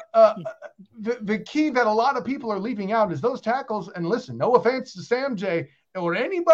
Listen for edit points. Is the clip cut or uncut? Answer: uncut